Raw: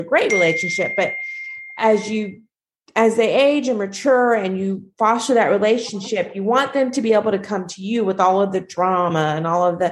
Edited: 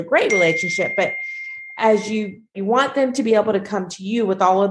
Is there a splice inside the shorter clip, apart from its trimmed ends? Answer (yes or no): yes